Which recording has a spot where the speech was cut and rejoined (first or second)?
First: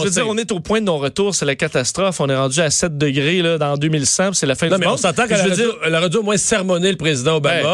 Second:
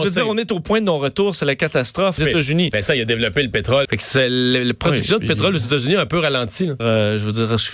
second